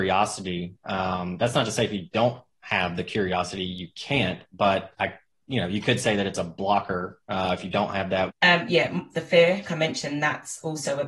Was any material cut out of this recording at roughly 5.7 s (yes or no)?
no